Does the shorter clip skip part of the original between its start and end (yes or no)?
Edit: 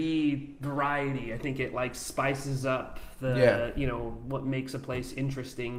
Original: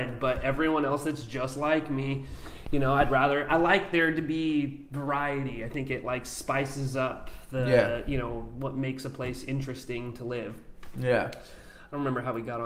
no